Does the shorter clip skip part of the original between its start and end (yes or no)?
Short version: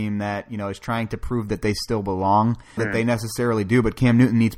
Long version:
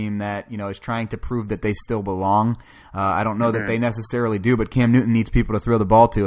yes